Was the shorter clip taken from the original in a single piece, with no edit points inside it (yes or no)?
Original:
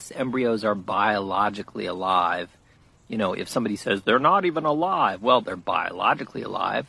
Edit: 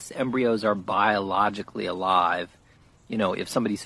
yes